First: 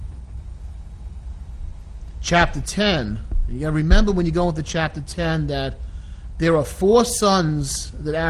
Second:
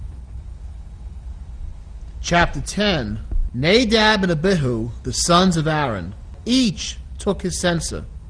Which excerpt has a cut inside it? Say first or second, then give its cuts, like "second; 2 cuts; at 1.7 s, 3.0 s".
second; 1 cut; at 3.5 s